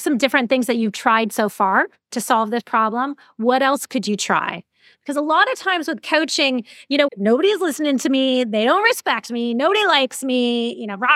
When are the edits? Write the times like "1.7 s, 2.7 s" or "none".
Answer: 7.1 s